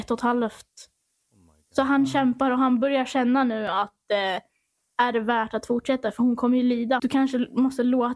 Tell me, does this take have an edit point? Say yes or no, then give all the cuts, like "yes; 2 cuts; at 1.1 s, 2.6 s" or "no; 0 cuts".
yes; 1 cut; at 7.0 s